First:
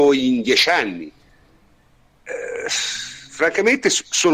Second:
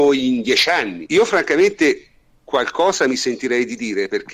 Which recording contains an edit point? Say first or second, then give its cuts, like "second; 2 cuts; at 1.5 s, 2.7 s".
second; 1 cut; at 1.1 s